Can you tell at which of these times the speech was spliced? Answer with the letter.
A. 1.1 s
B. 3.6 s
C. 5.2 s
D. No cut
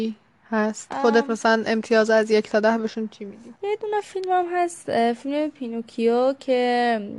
B